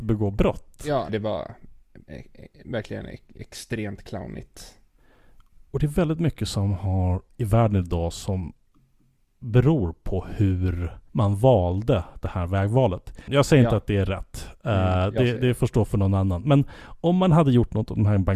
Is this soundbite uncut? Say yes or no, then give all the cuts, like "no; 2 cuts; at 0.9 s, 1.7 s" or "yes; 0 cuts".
no; 3 cuts; at 1.1 s, 11.1 s, 13.3 s